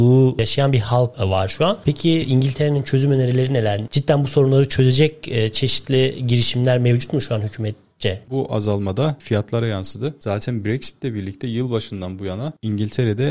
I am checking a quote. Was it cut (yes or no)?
yes